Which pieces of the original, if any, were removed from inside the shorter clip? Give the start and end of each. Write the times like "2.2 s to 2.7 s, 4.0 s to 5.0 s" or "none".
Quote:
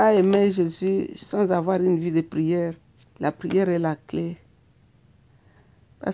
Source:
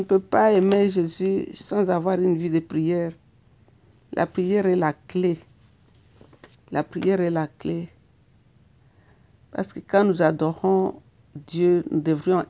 3.4 s to 6.5 s